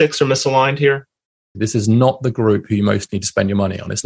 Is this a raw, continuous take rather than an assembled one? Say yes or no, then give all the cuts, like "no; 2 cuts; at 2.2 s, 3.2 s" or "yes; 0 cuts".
no; 1 cut; at 1.5 s